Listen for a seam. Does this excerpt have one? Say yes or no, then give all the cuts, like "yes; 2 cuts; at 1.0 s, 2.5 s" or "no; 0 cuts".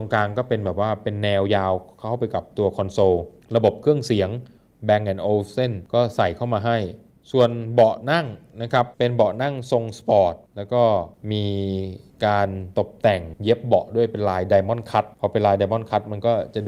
no; 0 cuts